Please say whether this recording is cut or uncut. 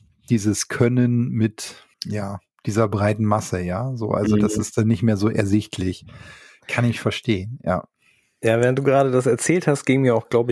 cut